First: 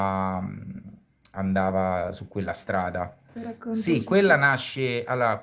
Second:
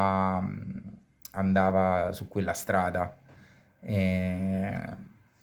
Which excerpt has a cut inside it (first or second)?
first